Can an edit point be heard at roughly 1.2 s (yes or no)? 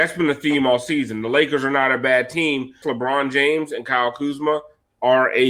no